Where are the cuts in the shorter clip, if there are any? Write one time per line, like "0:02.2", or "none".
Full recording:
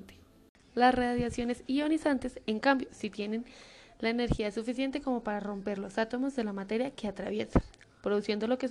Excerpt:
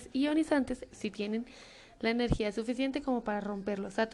0:00.9